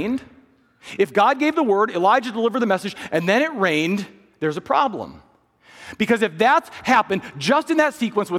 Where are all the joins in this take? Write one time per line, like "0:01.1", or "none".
none